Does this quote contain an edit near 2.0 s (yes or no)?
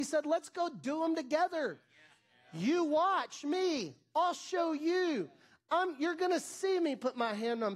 no